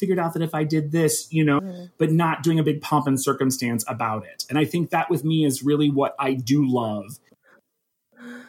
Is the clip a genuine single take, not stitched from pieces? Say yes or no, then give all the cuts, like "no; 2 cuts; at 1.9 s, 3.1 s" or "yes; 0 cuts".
no; 1 cut; at 1.6 s